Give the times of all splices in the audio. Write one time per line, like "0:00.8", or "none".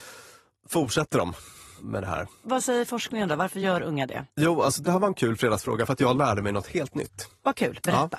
none